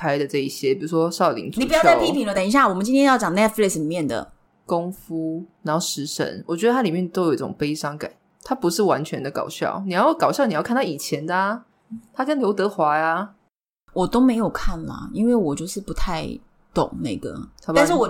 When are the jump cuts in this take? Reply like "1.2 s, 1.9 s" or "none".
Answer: none